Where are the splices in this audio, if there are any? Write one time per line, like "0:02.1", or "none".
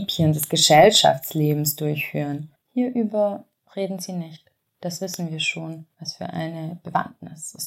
0:02.6
0:04.6
0:05.9